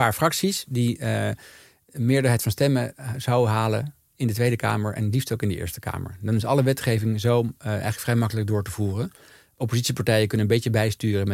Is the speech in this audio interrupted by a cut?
no; 0 cuts

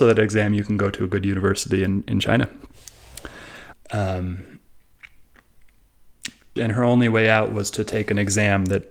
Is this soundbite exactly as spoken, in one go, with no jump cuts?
no; 2 cuts; at 3.7 s, 6.6 s

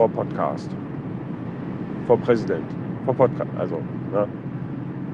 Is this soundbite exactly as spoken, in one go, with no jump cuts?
no; 1 cut; at 3.5 s

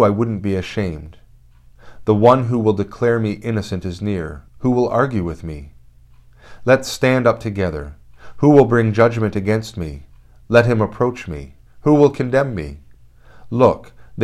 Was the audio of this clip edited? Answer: yes; 2 cuts; at 4.5 s, 11.7 s

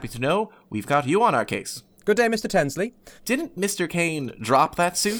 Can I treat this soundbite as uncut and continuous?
no; 2 cuts; at 2.0 s, 3.2 s

